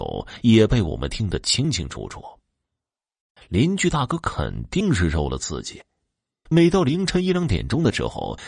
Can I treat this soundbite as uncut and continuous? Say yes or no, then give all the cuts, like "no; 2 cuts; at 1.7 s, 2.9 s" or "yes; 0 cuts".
no; 2 cuts; at 3.4 s, 6.5 s